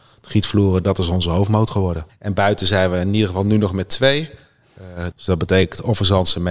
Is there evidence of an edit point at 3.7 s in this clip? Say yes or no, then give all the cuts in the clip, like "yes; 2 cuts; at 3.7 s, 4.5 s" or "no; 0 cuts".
no; 2 cuts; at 2.1 s, 5.1 s